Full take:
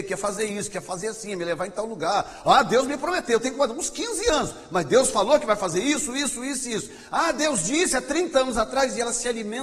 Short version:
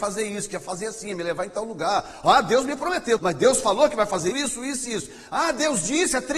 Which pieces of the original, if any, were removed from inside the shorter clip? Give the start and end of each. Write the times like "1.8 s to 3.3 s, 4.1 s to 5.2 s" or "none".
3.4 s to 4.7 s, 5.8 s to 6.1 s